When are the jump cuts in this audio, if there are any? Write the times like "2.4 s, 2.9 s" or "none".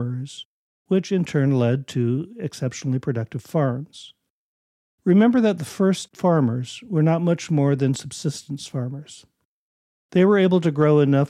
none